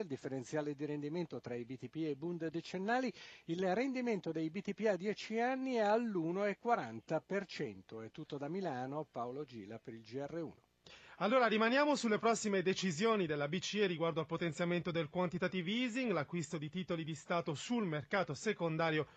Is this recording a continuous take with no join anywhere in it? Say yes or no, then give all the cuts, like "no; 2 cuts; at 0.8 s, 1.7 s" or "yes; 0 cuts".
yes; 0 cuts